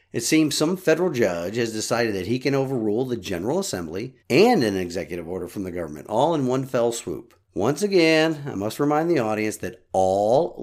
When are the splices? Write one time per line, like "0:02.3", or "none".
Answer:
0:04.2
0:07.4